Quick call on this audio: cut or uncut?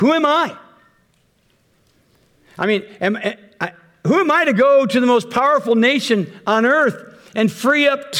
uncut